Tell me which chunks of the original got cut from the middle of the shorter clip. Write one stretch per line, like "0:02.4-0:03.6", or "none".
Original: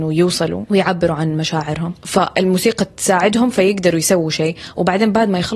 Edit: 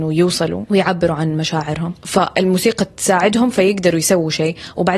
none

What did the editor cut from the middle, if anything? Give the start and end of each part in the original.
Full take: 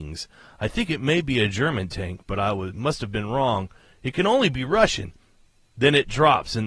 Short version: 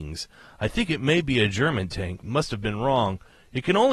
0:02.2-0:02.7

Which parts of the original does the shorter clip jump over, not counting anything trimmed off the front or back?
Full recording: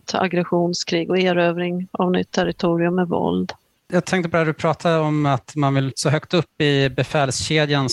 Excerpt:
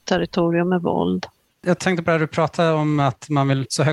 none

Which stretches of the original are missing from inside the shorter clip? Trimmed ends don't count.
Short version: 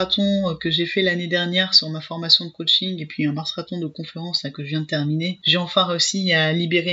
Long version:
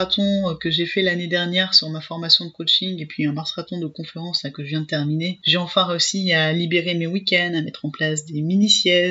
none

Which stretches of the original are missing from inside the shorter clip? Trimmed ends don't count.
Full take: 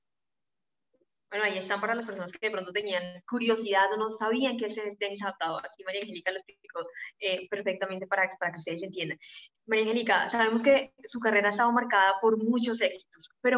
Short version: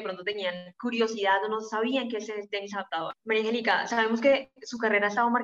0:05.6-0:09.5

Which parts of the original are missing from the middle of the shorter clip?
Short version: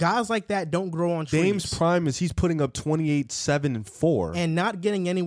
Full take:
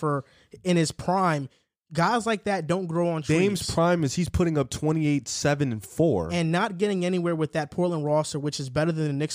none

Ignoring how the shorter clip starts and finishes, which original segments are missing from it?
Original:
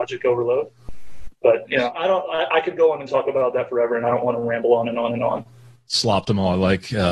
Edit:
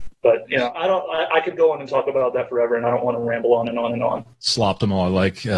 0:05.5-0:05.8

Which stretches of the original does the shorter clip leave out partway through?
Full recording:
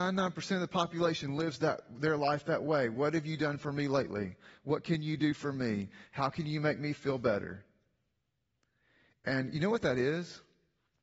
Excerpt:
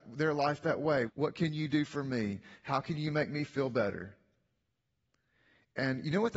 0:02.9-0:04.5

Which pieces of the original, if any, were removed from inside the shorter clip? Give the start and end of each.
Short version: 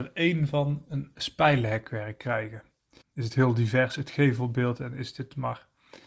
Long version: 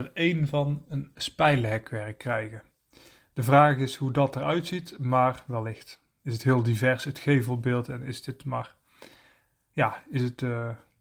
0:03.0-0:06.1

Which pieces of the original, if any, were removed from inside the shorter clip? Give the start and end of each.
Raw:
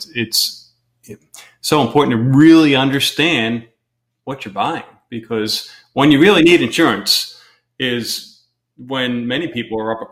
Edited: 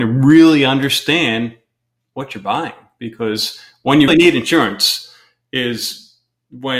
0:06.2-0:06.3

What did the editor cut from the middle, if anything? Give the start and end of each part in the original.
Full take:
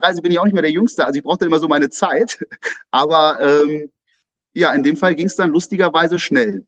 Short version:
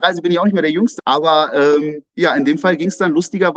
0:01.0-0:02.8
0:04.0-0:04.5

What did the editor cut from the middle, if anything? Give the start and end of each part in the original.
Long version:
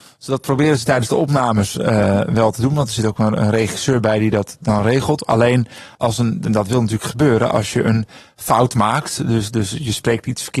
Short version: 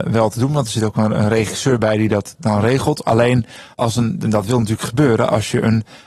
none

